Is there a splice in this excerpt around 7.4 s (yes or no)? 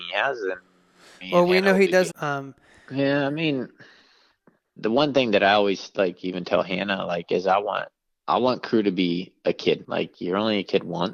no